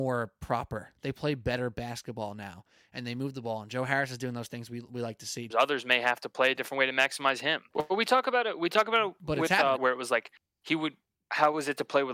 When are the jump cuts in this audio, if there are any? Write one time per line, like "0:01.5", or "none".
0:05.5
0:07.7
0:09.8